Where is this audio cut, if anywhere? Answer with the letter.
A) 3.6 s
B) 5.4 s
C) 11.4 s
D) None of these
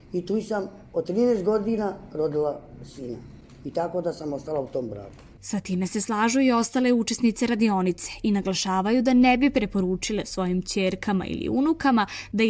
B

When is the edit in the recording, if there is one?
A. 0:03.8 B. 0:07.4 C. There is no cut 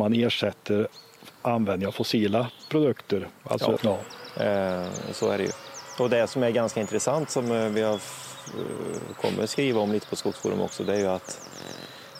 A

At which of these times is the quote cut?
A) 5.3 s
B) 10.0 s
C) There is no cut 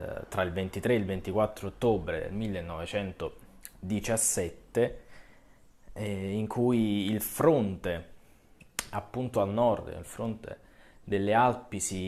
C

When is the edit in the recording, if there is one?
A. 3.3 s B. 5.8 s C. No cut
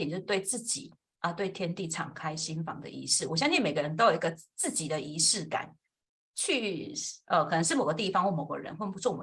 C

